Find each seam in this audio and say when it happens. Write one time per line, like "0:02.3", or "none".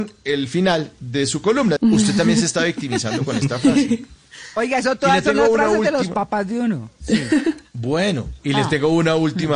0:01.8

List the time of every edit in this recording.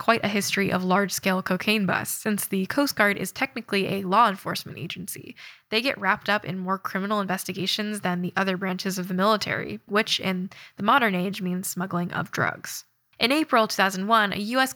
0:09.9
0:13.1

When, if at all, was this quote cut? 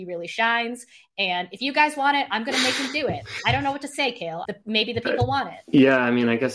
0:04.4

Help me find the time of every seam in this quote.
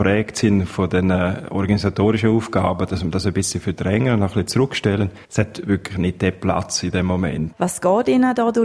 0:07.5

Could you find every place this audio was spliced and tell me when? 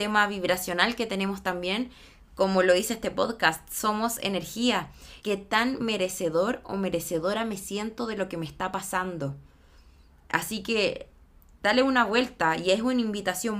0:05.2

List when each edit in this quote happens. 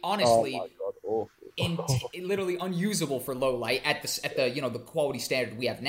none

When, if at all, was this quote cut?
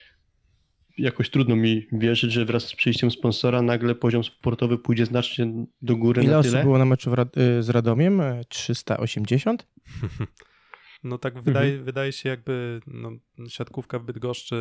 none

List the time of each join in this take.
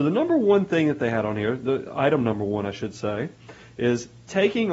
none

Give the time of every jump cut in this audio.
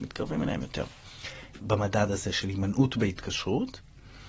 0:01.6

